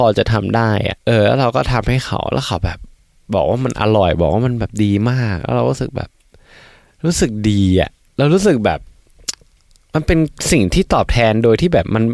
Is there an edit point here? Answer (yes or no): no